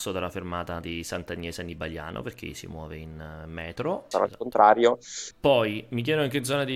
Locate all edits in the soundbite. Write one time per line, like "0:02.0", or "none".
0:04.1
0:05.3